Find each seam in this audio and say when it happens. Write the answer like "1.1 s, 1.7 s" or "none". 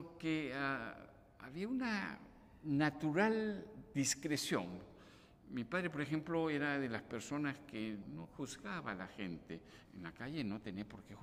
8.0 s, 9.9 s